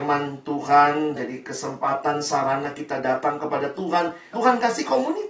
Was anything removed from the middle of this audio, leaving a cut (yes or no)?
yes